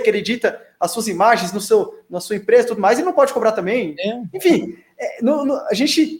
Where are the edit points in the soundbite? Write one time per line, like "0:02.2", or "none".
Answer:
none

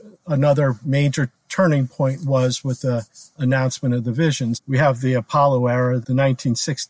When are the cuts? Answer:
0:04.5
0:06.0

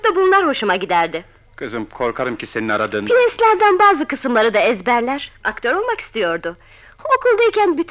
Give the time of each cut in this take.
0:05.4

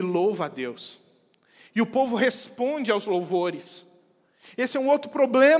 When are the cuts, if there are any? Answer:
none

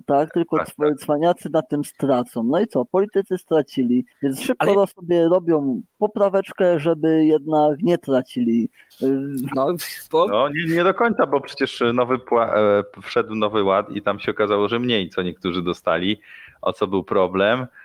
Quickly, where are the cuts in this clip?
0:09.5

